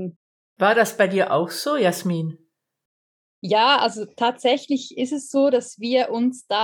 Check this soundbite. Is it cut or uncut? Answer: uncut